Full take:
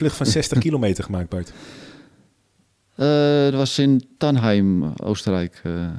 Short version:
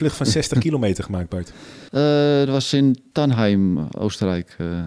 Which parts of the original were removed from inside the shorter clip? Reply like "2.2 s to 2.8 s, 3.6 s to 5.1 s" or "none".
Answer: 1.9 s to 2.9 s